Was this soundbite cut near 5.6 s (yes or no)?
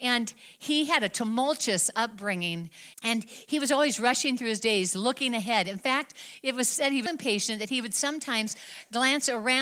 no